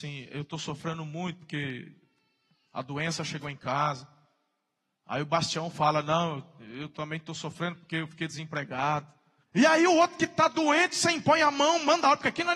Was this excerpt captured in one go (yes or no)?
no